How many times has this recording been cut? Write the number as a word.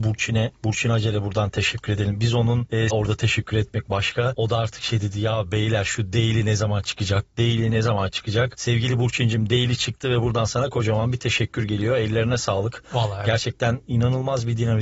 one